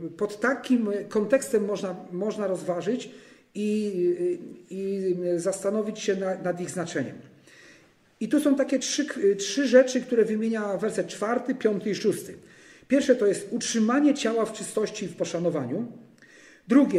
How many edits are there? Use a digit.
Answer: 0